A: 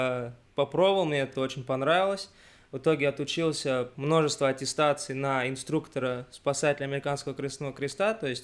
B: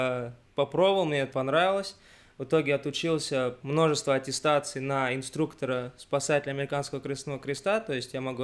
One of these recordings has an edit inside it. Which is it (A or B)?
B